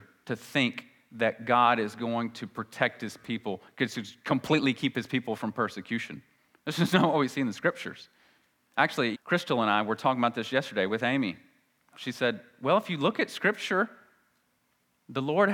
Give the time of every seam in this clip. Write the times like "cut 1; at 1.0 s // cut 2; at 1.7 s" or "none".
cut 1; at 9.1 s // cut 2; at 11.9 s

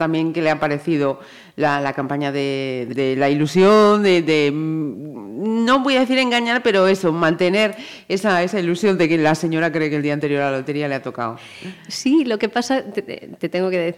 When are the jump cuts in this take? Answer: cut 1; at 2.9 s

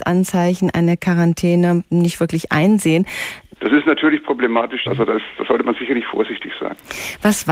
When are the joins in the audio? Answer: cut 1; at 3.6 s // cut 2; at 4.9 s

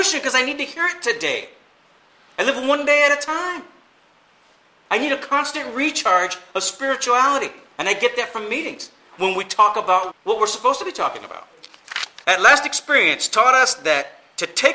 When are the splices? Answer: cut 1; at 10.1 s // cut 2; at 12.2 s

